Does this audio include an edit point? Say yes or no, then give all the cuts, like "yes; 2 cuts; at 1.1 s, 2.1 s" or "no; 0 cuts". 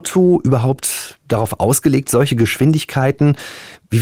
no; 0 cuts